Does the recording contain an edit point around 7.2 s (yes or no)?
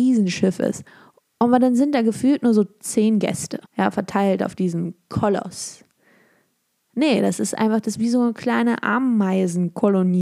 no